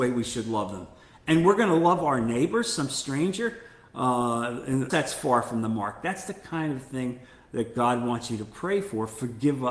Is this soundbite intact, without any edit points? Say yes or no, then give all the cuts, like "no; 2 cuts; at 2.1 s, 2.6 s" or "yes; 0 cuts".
no; 1 cut; at 4.9 s